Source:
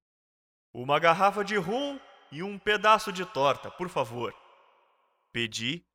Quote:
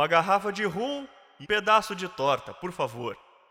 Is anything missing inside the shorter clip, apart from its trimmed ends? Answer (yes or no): yes